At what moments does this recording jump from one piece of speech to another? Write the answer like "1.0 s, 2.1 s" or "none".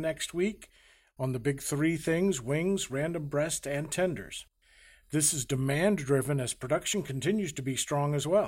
none